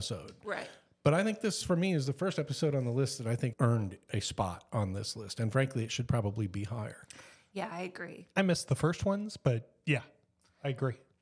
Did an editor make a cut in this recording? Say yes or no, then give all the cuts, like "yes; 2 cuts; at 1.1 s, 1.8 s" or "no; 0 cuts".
yes; 1 cut; at 3.5 s